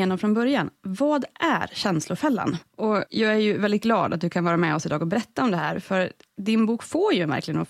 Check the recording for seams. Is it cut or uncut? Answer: cut